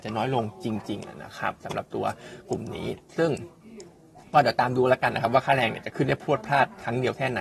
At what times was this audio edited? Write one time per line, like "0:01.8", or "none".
none